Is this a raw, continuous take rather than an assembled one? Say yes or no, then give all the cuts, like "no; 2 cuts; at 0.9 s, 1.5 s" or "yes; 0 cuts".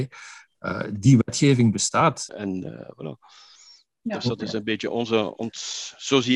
no; 1 cut; at 2.3 s